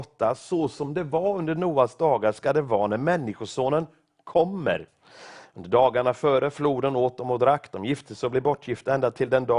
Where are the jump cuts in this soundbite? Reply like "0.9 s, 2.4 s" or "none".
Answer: none